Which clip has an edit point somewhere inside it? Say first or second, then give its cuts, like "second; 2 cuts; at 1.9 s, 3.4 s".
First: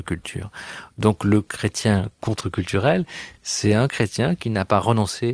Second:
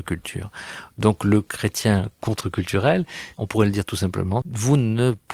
second; 2 cuts; at 3.3 s, 4.4 s